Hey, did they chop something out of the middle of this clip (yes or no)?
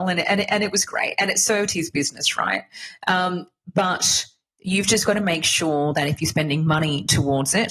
no